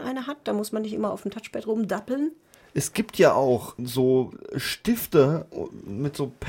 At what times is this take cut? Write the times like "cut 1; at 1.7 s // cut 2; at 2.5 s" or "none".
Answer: cut 1; at 3.8 s